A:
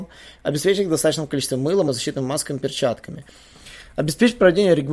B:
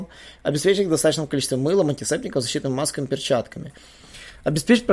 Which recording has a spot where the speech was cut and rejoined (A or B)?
A